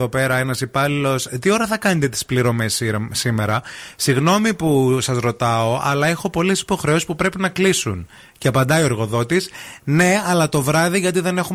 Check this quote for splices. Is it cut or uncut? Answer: uncut